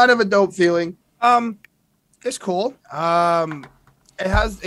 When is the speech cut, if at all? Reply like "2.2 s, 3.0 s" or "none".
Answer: 1.0 s, 2.8 s